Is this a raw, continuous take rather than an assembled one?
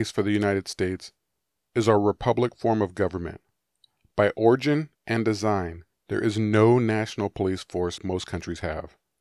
no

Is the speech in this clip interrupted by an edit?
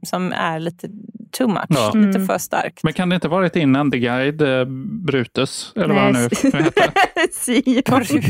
no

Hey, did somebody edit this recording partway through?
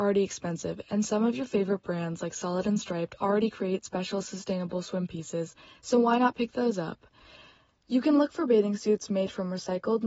no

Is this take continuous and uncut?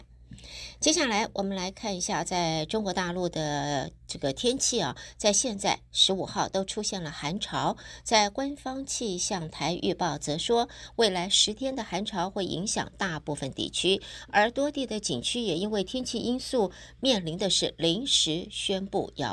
no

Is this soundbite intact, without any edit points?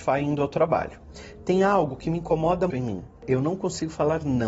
no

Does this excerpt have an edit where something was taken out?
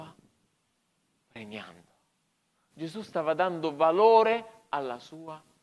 yes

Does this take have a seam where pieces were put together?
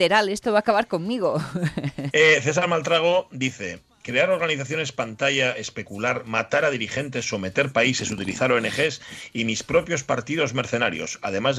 yes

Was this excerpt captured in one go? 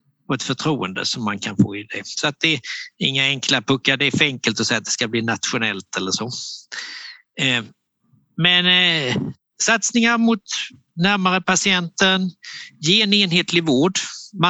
yes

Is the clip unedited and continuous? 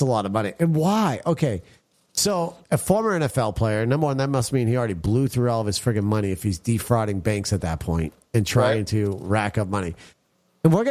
yes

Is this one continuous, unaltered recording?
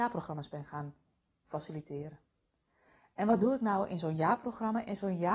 yes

